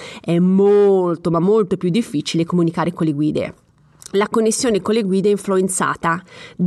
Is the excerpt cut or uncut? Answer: uncut